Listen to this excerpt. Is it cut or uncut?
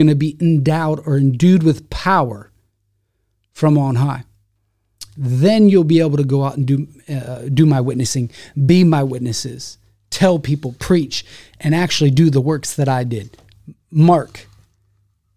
uncut